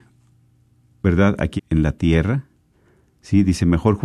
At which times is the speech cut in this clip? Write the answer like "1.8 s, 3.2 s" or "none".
1.6 s

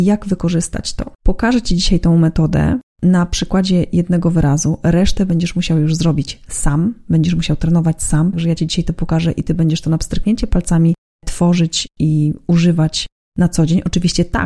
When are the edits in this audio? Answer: 1.1 s, 8.3 s

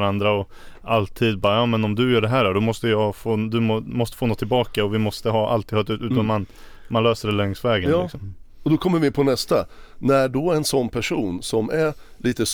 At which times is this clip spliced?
none

